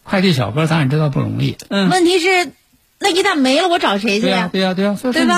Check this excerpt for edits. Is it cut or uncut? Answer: cut